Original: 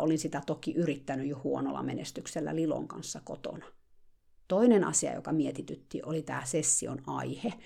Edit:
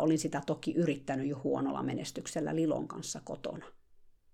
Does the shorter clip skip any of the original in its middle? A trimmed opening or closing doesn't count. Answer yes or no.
no